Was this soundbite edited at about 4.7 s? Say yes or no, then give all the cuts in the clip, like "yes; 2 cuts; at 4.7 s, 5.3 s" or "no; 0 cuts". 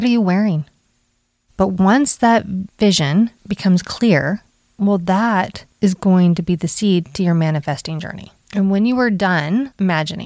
no; 2 cuts; at 1.5 s, 8.4 s